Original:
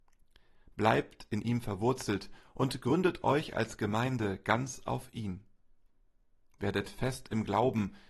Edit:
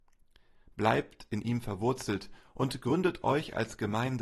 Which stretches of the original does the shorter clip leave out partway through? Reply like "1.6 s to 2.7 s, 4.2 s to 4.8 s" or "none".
none